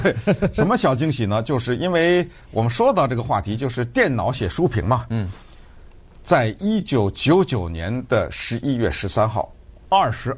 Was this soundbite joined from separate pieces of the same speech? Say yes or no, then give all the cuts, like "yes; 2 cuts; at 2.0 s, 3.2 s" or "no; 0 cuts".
no; 0 cuts